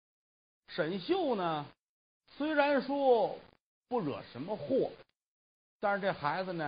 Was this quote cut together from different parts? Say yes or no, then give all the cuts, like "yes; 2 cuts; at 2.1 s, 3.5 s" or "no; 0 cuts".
no; 0 cuts